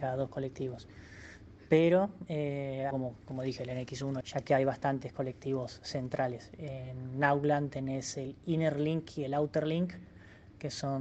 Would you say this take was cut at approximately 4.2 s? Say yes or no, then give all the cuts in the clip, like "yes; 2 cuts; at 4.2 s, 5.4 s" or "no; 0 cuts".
yes; 2 cuts; at 2.9 s, 4.2 s